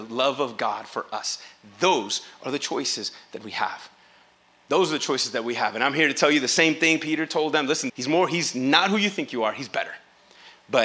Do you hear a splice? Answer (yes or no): yes